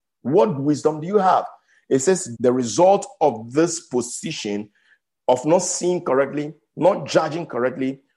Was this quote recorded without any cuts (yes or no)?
no